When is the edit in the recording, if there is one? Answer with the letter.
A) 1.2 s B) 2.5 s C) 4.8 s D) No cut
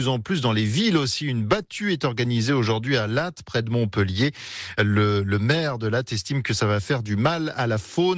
D